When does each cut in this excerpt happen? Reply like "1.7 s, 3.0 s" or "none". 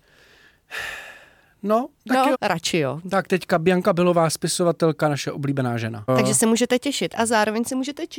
2.3 s, 6.1 s